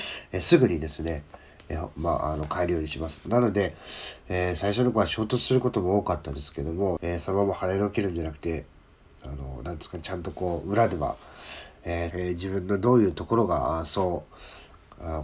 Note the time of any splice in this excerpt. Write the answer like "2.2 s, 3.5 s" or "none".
3.2 s, 7.0 s, 12.1 s